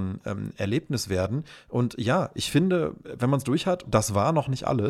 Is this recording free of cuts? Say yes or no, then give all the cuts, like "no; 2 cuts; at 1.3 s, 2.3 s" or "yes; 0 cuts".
no; 1 cut; at 3.8 s